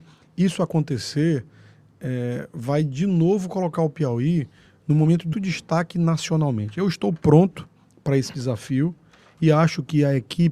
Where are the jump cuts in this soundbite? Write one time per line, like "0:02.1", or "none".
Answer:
0:05.3